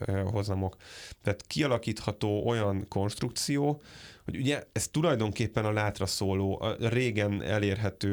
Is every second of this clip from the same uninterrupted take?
yes; 0 cuts

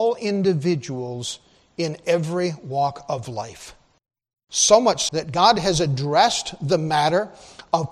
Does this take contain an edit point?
yes; 1 cut; at 5.1 s

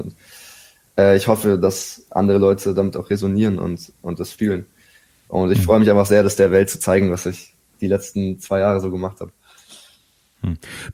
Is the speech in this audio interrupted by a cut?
no; 0 cuts

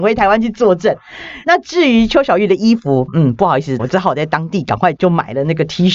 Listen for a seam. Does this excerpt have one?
yes; 3 cuts; at 1.4 s, 3.8 s, 5.0 s

